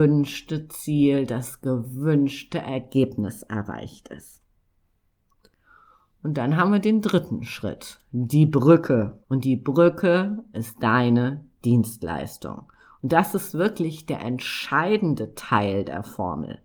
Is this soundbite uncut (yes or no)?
no